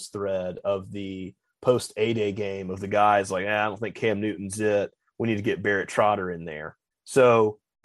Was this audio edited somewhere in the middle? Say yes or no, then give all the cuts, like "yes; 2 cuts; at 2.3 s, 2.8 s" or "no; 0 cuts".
yes; 1 cut; at 6.9 s